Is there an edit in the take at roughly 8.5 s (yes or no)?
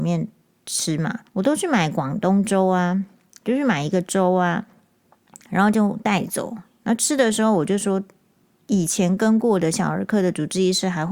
yes